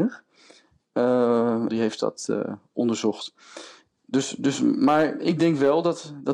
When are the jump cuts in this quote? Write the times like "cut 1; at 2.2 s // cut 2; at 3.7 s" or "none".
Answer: cut 1; at 1.7 s